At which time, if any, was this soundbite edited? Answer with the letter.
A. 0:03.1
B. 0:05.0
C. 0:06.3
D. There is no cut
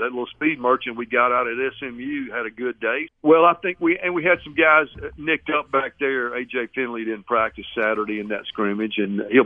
A